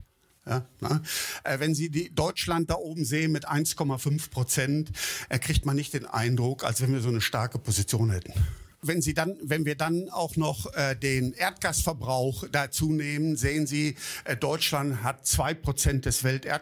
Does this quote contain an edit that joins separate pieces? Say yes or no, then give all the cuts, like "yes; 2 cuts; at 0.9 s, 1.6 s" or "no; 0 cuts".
no; 0 cuts